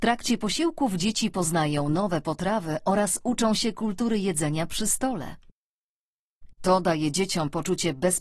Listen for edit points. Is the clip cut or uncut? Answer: cut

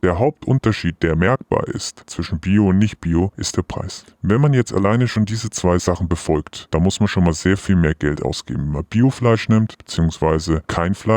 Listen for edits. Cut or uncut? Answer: uncut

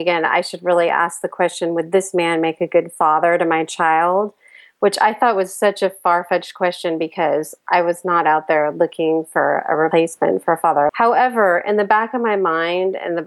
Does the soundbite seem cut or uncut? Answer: cut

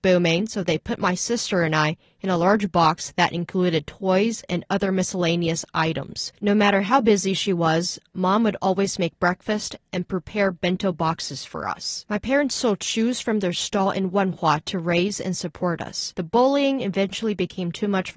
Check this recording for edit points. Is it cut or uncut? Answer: cut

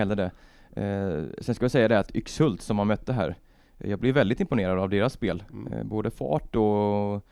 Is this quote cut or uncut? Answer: uncut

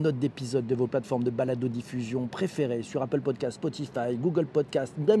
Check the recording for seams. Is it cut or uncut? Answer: uncut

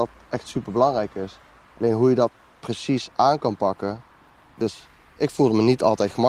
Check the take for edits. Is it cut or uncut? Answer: cut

